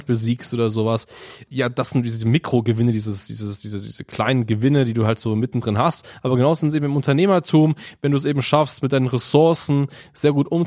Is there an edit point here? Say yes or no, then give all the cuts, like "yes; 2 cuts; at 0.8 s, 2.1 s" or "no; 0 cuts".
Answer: no; 0 cuts